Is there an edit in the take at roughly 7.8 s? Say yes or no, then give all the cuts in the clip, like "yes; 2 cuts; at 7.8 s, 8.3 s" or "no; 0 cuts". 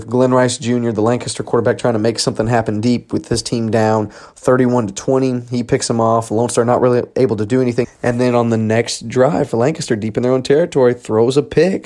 yes; 1 cut; at 7.8 s